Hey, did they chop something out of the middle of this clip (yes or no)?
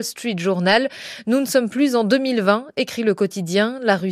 no